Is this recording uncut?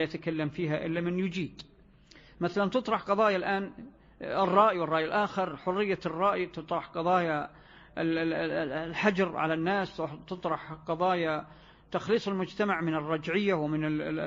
yes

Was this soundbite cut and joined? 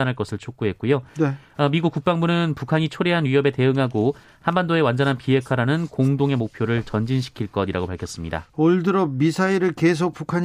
no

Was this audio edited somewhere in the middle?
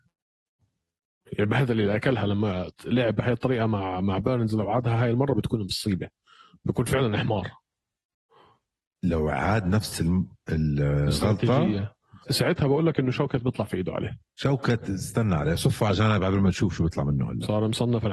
yes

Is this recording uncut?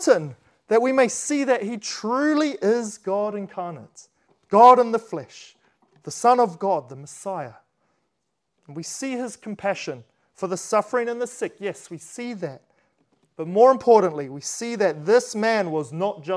yes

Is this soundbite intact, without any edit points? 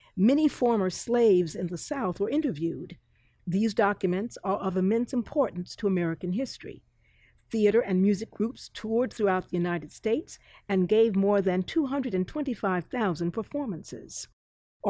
yes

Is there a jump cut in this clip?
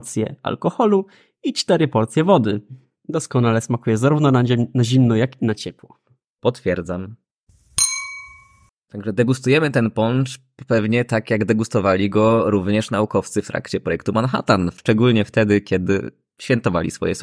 no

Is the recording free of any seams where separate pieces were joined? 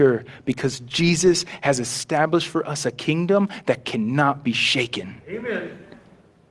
yes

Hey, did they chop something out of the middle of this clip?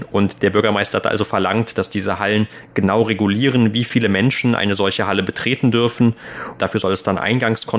yes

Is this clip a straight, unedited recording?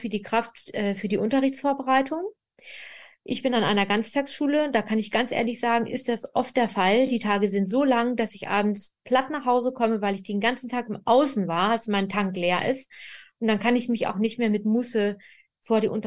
yes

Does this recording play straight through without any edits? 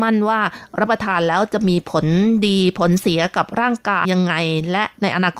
no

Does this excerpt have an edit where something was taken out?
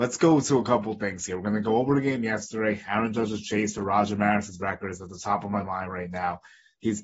no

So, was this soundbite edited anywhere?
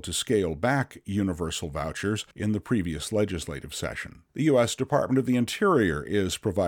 yes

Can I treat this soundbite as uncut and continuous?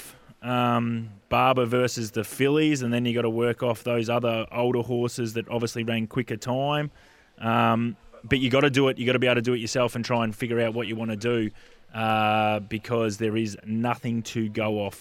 yes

